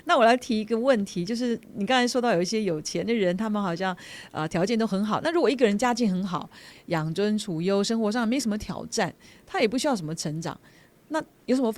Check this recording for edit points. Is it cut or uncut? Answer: uncut